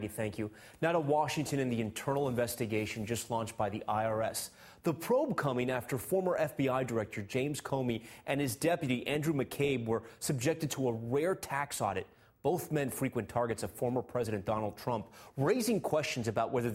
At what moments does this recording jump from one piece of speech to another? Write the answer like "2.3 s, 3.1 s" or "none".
none